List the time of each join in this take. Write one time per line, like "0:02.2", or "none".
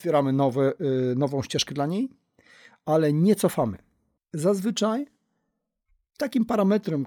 0:04.2